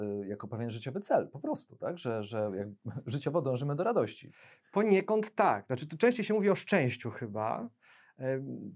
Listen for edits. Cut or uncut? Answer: uncut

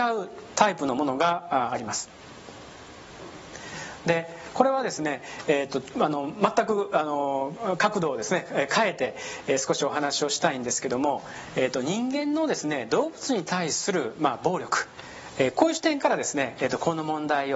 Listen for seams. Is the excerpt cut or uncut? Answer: uncut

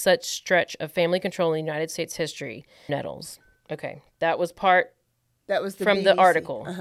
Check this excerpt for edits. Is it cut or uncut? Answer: cut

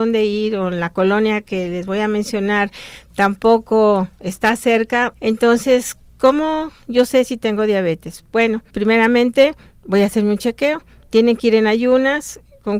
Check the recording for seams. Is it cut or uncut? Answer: cut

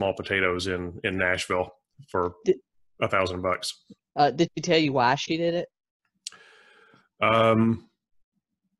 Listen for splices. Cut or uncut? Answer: uncut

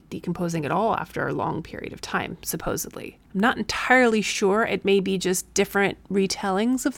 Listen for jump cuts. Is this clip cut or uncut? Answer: uncut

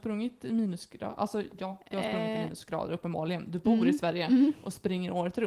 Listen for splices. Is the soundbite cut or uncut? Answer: uncut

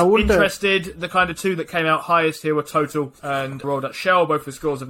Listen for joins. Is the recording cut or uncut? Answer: cut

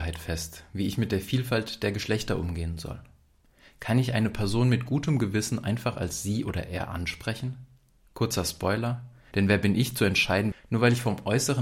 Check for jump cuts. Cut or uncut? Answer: cut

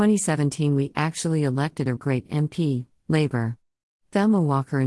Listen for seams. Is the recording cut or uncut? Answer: cut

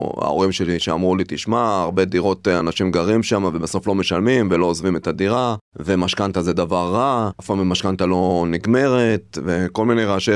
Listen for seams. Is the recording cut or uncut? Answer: uncut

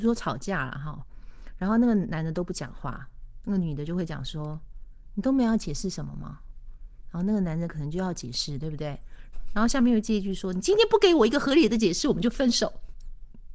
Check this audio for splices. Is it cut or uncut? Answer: cut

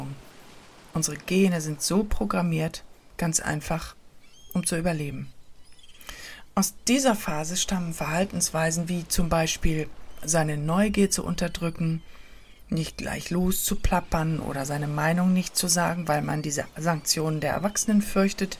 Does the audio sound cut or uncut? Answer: uncut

